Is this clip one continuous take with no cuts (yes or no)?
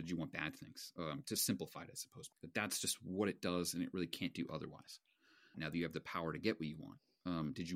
no